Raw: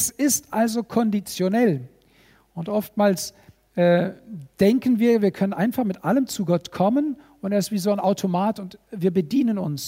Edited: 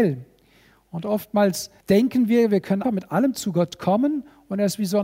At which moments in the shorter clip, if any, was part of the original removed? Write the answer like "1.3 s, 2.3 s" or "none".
1.8 s, 2.8 s